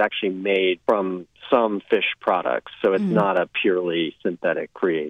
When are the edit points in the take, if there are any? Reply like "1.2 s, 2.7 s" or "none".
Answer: none